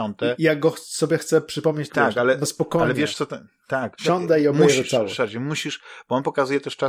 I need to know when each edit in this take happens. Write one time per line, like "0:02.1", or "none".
0:01.9